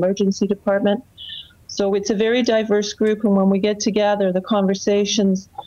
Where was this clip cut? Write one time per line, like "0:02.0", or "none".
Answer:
0:01.6